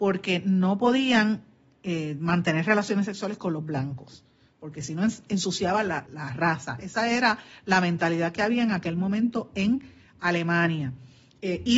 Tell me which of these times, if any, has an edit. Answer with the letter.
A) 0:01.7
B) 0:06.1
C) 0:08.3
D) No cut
B